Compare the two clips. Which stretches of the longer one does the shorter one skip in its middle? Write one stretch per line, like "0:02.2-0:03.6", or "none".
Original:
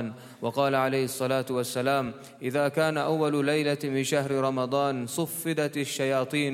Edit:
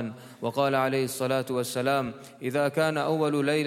none